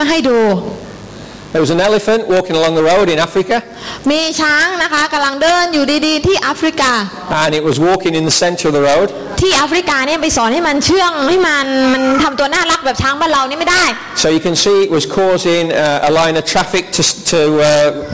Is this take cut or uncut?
cut